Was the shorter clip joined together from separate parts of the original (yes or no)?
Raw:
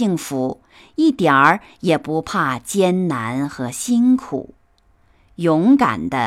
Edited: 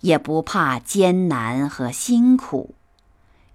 no